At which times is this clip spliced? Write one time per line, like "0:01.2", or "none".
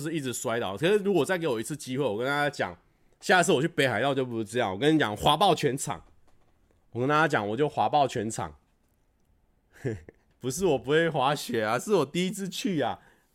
0:10.3